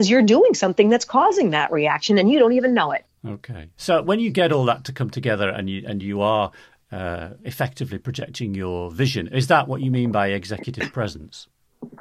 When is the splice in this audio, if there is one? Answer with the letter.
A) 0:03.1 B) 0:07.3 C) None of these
C